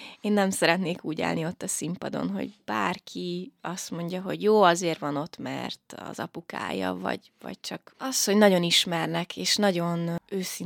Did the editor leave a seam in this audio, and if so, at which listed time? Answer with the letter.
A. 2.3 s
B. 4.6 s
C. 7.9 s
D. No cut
C